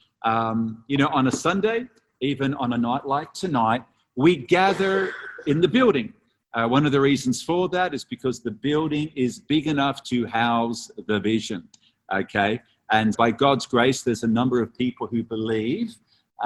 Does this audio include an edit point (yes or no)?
yes